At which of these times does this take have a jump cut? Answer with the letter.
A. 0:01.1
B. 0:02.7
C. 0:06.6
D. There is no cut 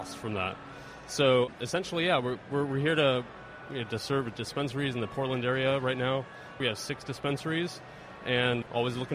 C